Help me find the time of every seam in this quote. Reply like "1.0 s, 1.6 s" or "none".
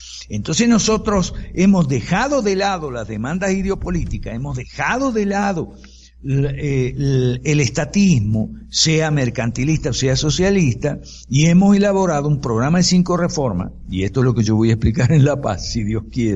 none